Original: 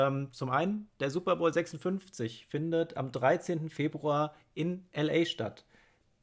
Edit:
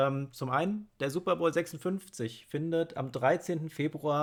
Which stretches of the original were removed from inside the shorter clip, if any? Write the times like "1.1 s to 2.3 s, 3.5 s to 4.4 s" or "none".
none